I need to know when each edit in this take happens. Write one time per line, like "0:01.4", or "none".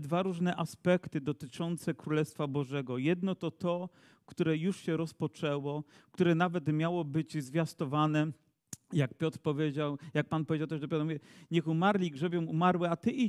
none